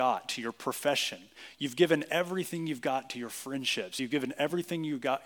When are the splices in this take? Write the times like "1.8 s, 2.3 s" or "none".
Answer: none